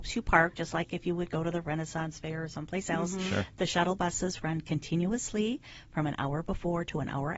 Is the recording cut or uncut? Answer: uncut